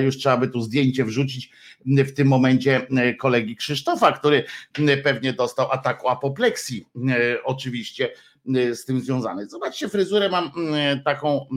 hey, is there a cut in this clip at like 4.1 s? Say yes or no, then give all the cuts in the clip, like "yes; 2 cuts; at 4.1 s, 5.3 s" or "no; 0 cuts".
no; 0 cuts